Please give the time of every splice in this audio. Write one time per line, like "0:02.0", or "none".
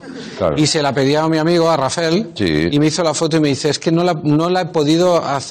none

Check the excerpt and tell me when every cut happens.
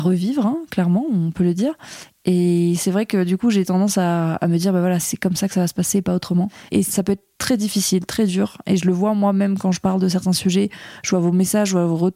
0:06.7

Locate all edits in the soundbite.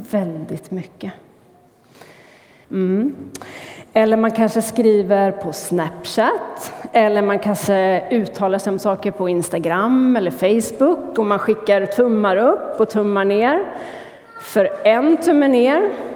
0:02.6

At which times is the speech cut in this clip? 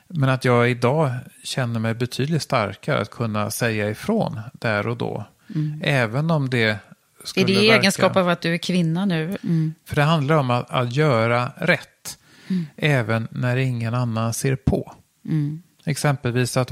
0:09.4

